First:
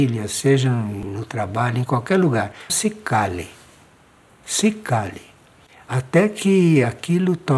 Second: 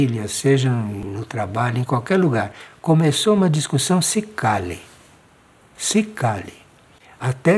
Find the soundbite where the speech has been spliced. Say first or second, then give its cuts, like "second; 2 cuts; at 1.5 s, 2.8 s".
first; 1 cut; at 2.7 s